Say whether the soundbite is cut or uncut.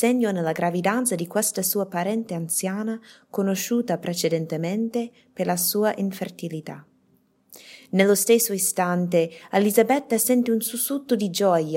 uncut